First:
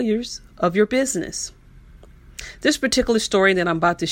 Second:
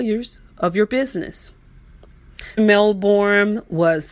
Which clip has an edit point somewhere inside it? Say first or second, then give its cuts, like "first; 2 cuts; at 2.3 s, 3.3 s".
second; 1 cut; at 2.6 s